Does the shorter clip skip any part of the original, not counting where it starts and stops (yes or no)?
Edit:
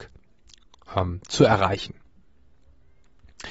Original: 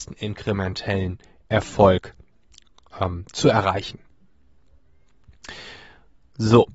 no